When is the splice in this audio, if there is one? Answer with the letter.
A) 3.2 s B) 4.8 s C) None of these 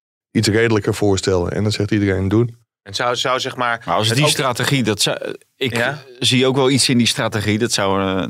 A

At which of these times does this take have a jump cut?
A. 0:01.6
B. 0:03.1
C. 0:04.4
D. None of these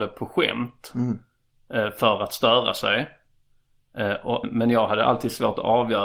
C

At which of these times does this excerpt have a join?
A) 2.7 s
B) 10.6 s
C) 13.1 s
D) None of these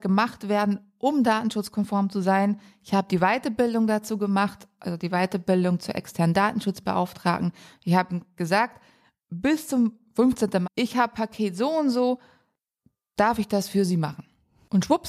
B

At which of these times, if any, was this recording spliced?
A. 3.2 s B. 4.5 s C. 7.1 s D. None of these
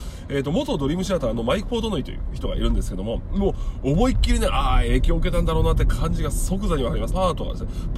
C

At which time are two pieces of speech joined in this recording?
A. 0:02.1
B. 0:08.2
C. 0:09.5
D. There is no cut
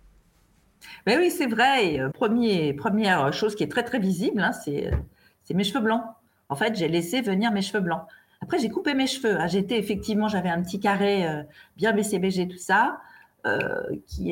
A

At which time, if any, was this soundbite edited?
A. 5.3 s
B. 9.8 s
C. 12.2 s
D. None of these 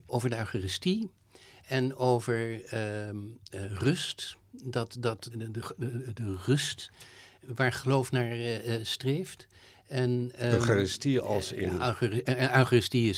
A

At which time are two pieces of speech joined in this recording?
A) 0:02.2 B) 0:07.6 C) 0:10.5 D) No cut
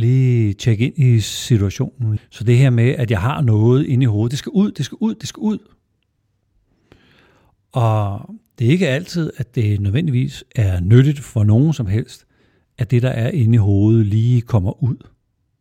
A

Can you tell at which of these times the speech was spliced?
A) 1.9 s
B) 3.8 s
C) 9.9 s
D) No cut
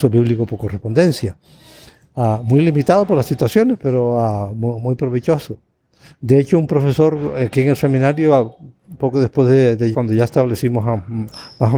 C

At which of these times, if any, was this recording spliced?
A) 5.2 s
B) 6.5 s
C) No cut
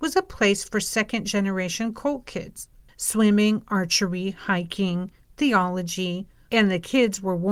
B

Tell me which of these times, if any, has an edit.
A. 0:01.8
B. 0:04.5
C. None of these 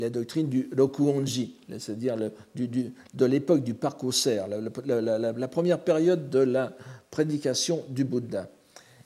C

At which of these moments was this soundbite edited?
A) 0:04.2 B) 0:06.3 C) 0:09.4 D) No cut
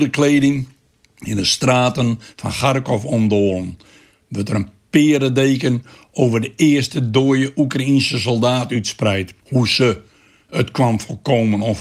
C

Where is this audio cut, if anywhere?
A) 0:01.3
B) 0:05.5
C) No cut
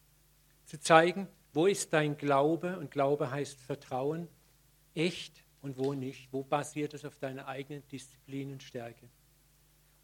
B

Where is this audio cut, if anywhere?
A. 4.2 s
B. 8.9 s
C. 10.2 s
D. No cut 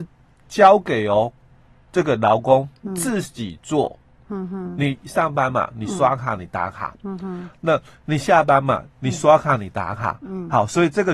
D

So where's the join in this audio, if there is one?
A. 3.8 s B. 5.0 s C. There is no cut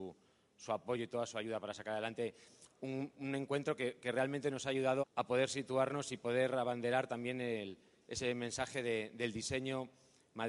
B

